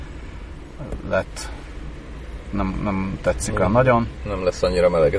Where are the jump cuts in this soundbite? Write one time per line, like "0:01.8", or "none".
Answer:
none